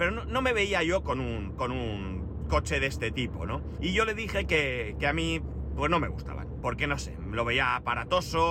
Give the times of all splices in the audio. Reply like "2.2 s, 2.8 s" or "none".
3.8 s, 6.6 s